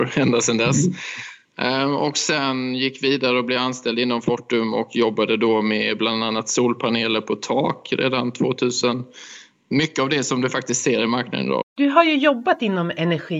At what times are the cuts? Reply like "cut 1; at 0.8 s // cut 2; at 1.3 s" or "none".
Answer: cut 1; at 9.7 s // cut 2; at 11.6 s